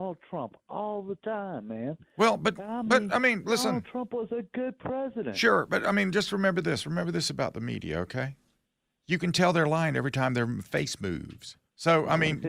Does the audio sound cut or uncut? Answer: uncut